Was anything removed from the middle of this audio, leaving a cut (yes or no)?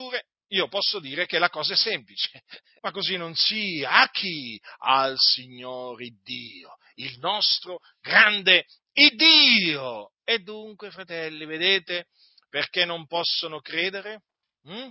yes